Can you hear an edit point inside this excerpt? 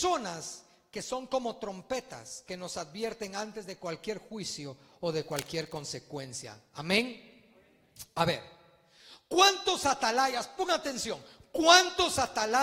no; 0 cuts

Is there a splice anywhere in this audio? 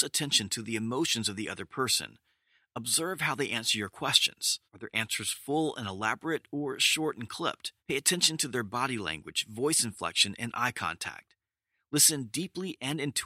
yes; 2 cuts; at 4.7 s, 7.8 s

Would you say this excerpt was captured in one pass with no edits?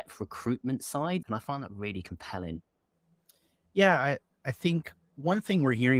no; 1 cut; at 1.2 s

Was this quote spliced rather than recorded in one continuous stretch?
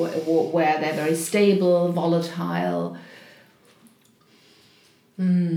no; 0 cuts

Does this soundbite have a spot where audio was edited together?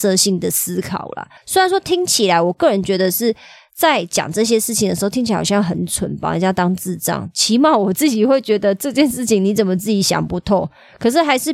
yes; 1 cut; at 1.4 s

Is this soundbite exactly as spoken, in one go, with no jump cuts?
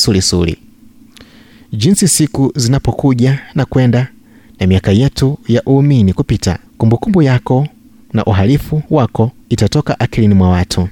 no; 2 cuts; at 6.7 s, 9.4 s

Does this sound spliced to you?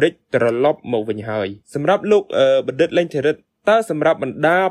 yes; 1 cut; at 1.6 s

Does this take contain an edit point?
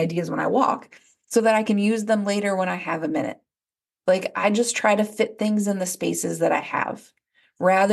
no; 0 cuts

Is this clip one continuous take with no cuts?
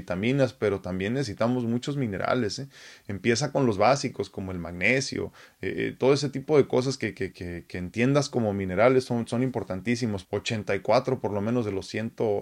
no; 2 cuts; at 7.3 s, 10.2 s

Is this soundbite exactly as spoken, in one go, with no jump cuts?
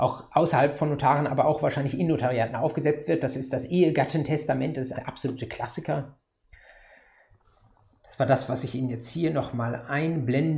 no; 1 cut; at 5.0 s

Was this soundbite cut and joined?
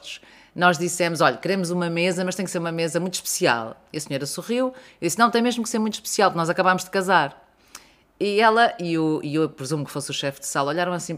no; 0 cuts

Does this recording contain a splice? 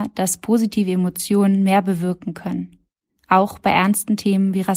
no; 0 cuts

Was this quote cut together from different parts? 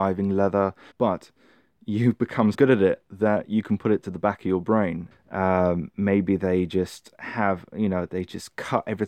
yes; 3 cuts; at 0.9 s, 2.5 s, 5.1 s

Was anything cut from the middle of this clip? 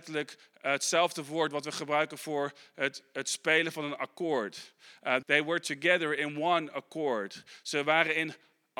yes; 1 cut; at 5.2 s

